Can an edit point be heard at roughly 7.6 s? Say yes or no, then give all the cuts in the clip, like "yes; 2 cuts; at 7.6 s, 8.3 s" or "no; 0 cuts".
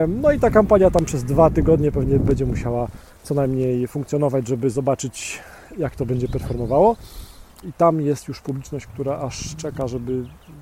yes; 1 cut; at 7.6 s